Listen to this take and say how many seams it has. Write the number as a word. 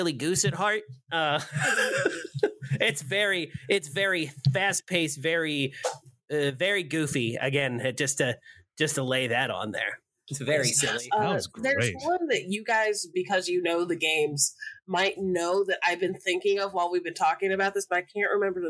zero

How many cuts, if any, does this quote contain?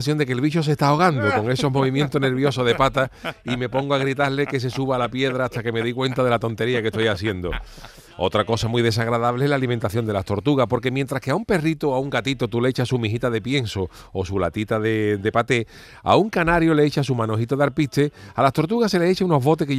zero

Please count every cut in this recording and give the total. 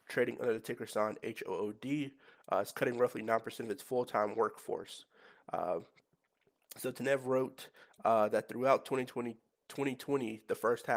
zero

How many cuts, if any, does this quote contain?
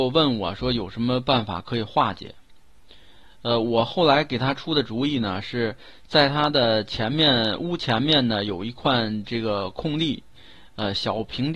zero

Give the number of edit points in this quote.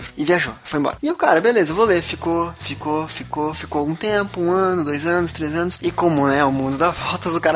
two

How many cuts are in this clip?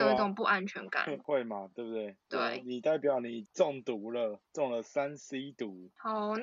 zero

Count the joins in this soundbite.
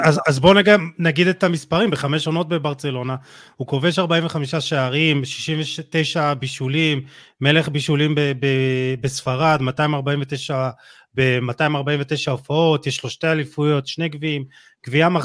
zero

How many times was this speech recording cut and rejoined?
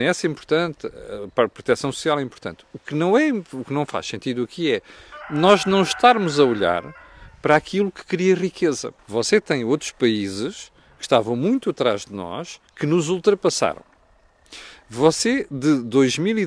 two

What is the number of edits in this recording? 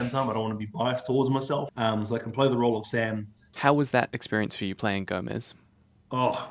two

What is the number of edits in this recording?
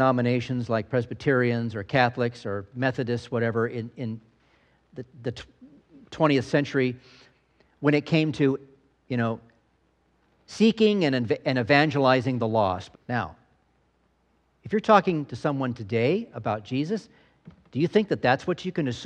one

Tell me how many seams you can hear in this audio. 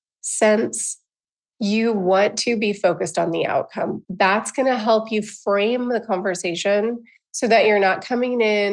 one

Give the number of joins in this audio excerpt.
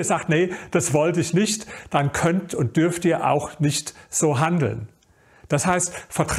zero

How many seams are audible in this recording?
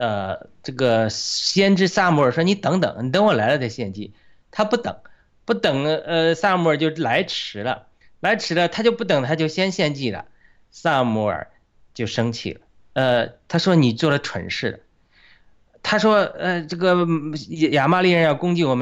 one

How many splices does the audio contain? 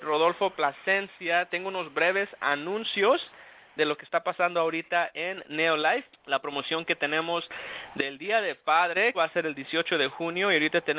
two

